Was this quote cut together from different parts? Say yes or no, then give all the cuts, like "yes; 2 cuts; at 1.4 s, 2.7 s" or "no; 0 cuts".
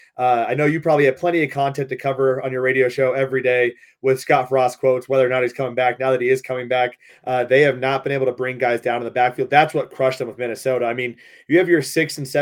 yes; 1 cut; at 7.1 s